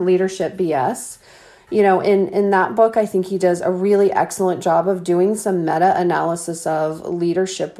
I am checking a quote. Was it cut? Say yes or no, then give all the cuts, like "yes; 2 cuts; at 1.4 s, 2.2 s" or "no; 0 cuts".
no; 0 cuts